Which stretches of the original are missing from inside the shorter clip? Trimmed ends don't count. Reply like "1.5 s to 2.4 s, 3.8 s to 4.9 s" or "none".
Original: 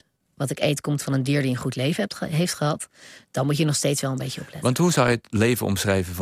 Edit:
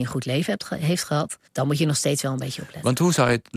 3.0 s to 3.3 s